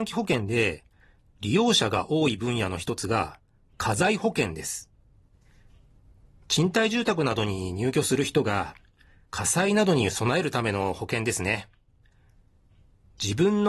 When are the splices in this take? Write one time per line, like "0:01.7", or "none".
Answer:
none